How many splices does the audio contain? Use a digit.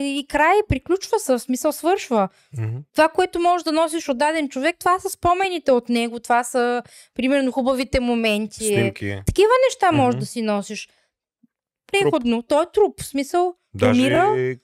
3